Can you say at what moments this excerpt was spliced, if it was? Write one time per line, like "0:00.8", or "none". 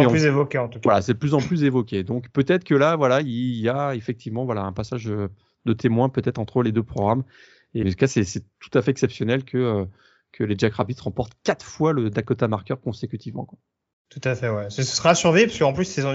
0:07.8